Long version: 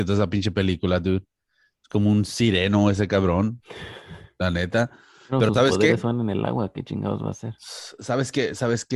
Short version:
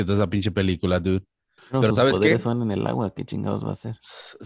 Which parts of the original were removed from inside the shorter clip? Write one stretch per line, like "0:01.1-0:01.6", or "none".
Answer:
0:01.6-0:05.2